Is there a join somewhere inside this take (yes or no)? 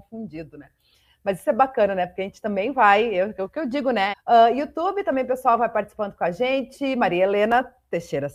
yes